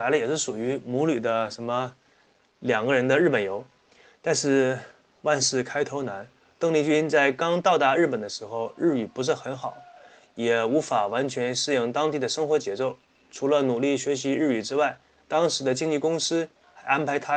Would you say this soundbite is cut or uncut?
uncut